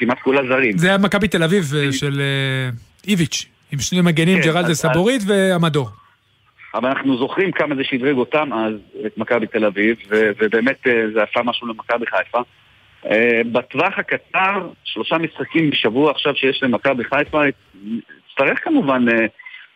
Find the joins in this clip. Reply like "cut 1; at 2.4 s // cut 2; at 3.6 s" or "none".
none